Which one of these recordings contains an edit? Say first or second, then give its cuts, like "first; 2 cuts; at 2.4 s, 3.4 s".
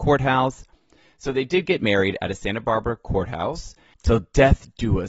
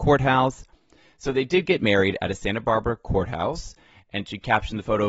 first; 1 cut; at 3.9 s